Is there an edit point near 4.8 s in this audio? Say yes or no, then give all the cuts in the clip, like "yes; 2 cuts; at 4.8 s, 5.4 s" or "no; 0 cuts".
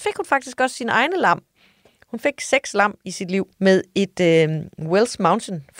no; 1 cut; at 3.5 s